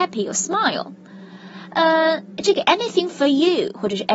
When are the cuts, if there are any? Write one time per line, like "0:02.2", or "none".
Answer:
none